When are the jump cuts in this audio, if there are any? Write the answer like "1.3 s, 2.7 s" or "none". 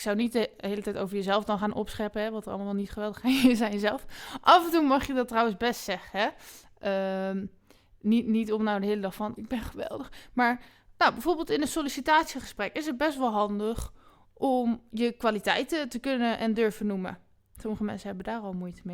9.4 s